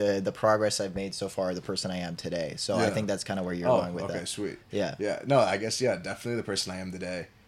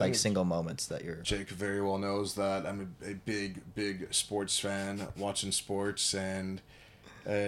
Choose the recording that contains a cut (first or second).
second